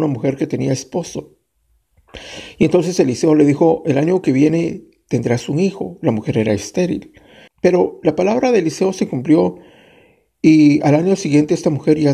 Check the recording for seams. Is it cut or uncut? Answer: cut